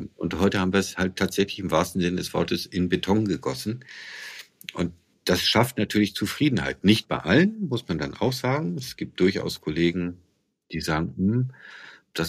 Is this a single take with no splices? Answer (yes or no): yes